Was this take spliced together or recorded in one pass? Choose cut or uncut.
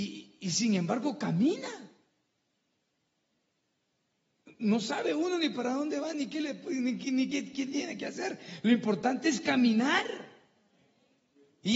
uncut